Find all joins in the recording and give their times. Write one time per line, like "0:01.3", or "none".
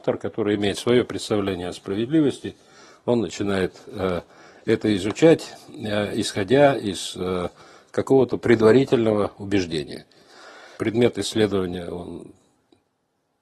0:10.8